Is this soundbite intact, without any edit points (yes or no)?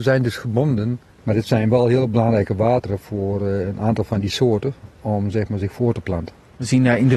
no